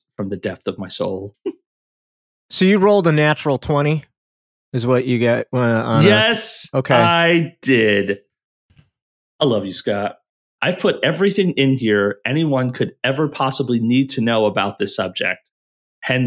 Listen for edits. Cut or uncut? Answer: cut